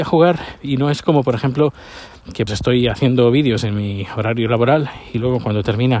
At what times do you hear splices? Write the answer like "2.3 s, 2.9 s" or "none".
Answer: 2.5 s

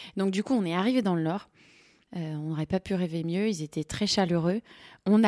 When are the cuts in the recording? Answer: 2.1 s

